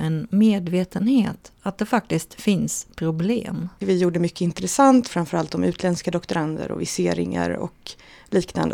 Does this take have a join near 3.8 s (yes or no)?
yes